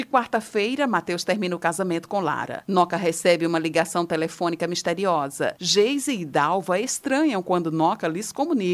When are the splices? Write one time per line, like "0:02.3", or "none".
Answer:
none